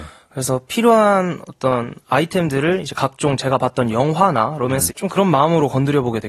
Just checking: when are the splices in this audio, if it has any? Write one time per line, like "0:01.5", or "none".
0:04.9